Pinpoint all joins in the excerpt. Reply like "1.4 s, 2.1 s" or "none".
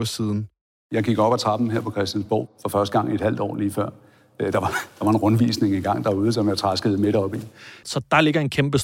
7.8 s